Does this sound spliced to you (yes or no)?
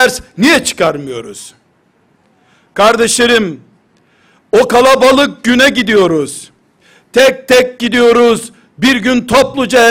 no